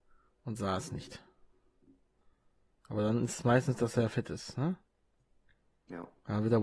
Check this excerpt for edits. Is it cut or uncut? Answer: uncut